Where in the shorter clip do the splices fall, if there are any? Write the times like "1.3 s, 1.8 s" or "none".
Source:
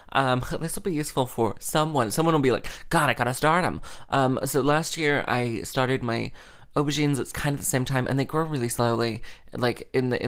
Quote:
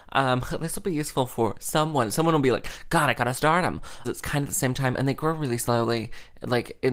4.0 s